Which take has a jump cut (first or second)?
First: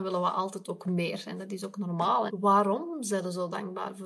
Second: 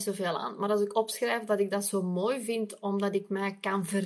first